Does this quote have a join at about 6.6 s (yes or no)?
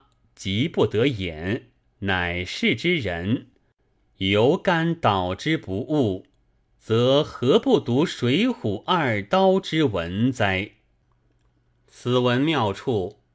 no